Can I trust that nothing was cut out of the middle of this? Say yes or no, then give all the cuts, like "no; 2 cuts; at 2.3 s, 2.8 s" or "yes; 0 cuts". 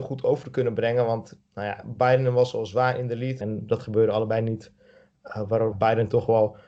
no; 2 cuts; at 3.4 s, 5.7 s